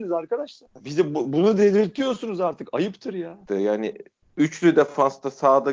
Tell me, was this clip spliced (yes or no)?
yes